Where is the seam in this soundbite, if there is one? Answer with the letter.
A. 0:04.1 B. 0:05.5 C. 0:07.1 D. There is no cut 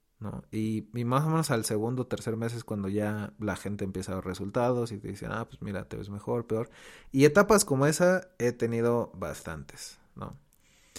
D